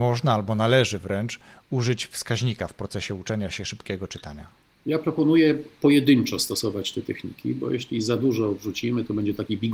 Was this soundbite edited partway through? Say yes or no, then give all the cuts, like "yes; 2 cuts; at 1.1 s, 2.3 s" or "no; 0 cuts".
no; 0 cuts